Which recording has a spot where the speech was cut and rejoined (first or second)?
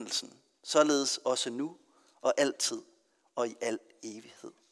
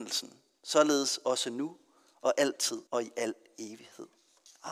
second